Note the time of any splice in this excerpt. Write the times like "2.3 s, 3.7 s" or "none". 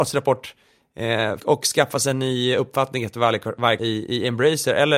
1.4 s, 3.8 s